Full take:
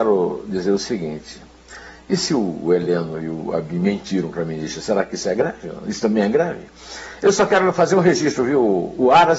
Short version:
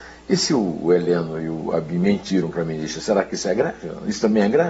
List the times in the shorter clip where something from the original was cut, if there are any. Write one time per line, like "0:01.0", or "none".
none